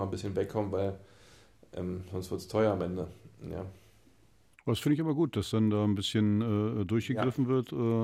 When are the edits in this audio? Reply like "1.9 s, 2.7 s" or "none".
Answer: none